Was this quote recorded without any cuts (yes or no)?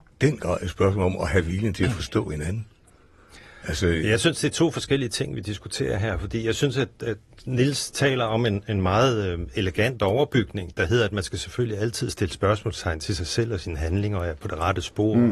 yes